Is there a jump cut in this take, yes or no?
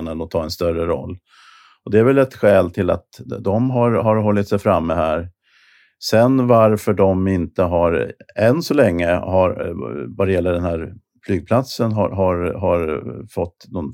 no